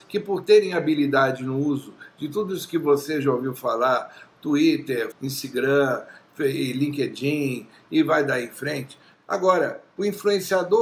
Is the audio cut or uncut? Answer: cut